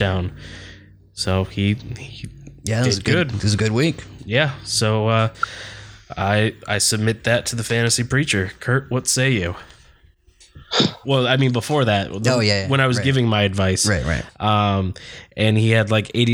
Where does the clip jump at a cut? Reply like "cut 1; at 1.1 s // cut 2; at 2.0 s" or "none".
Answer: cut 1; at 11.0 s